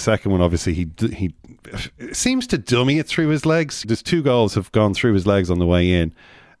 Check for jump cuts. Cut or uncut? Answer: cut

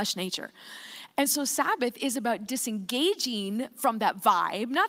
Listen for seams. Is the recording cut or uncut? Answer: uncut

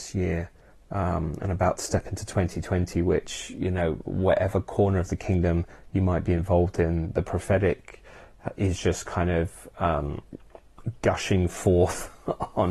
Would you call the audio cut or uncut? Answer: uncut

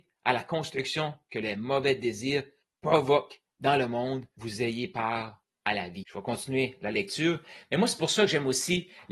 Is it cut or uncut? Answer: uncut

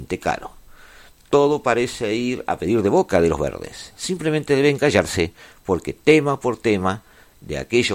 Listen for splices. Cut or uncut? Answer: uncut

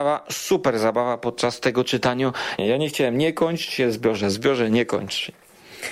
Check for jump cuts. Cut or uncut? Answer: cut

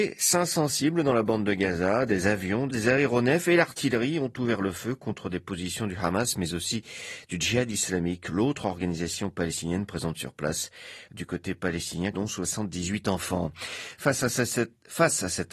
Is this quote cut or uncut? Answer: cut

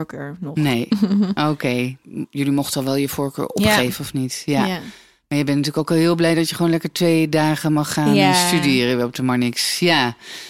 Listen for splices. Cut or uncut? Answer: uncut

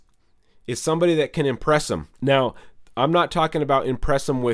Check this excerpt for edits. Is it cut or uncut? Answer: cut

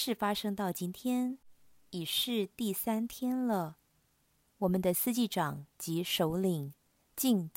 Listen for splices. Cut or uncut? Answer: cut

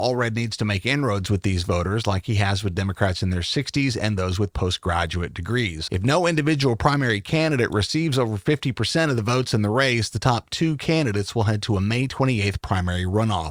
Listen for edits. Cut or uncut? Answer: cut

